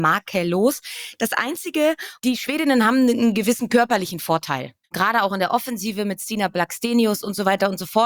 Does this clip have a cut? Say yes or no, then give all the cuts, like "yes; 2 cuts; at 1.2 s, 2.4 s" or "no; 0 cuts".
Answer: yes; 2 cuts; at 2.2 s, 4.8 s